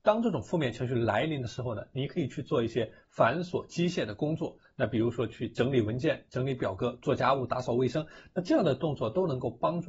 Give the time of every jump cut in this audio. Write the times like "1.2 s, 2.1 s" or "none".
none